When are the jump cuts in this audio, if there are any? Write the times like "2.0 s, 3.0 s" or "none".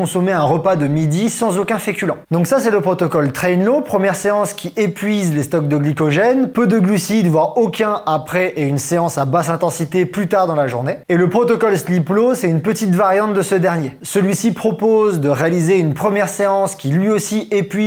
2.3 s